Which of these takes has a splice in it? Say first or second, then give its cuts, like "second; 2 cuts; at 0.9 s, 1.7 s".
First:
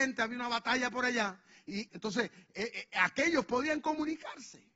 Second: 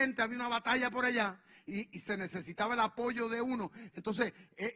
first; 1 cut; at 1.9 s